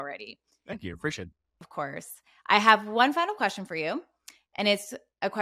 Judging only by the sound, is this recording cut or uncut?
uncut